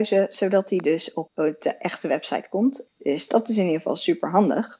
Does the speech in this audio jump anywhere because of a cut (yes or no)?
yes